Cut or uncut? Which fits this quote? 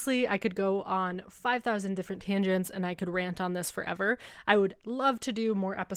uncut